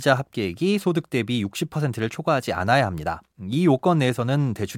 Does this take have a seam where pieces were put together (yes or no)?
no